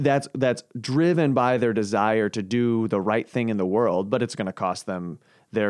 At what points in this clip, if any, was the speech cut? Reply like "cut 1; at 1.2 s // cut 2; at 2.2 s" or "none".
none